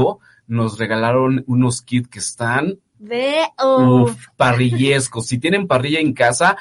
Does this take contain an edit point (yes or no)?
no